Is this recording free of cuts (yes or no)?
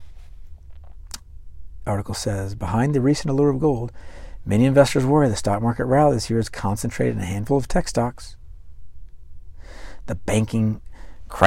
yes